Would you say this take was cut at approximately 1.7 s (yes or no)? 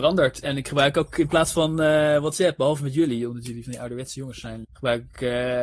no